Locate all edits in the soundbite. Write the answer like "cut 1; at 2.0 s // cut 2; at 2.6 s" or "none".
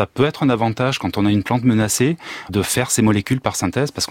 cut 1; at 2.5 s